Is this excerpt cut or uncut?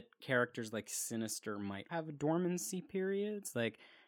cut